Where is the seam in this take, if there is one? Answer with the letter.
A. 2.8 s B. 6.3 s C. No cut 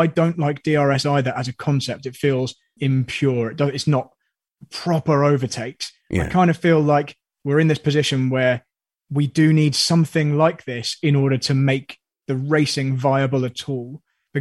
A